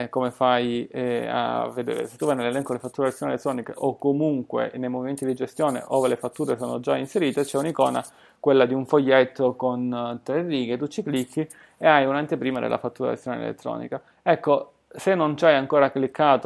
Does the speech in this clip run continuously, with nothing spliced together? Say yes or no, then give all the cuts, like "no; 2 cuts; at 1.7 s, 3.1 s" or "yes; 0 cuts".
yes; 0 cuts